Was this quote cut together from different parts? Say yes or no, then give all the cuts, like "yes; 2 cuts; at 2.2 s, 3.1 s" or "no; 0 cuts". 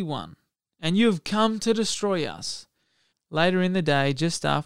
yes; 1 cut; at 3.1 s